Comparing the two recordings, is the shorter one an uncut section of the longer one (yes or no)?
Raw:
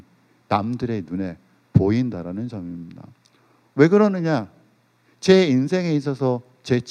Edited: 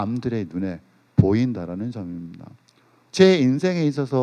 no